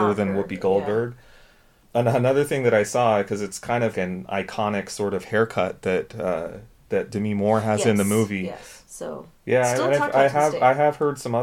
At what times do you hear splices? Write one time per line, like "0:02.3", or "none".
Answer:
0:03.9
0:08.9

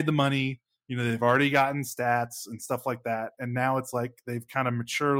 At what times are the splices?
none

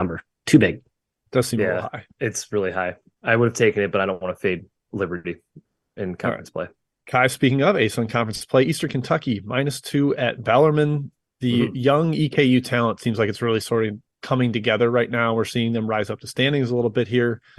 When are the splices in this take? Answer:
none

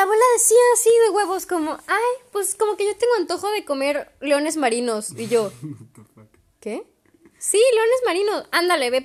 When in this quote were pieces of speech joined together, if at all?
none

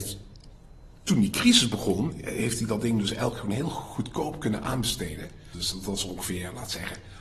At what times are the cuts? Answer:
0:05.5

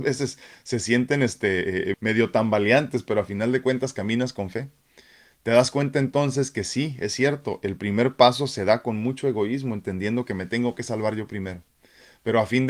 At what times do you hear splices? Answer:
0:01.9

